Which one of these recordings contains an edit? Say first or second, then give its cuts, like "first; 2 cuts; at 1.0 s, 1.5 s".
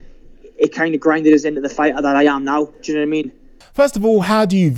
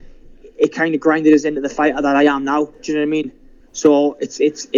first; 1 cut; at 3.6 s